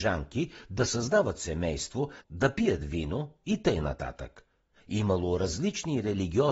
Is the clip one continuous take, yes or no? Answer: no